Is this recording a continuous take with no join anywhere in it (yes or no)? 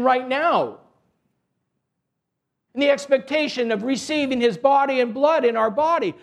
no